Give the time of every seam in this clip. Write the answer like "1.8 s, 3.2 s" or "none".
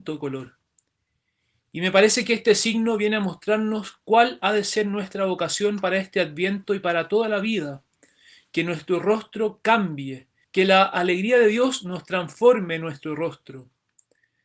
10.4 s